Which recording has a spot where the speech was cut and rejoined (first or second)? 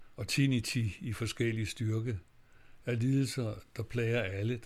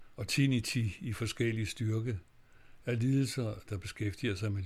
second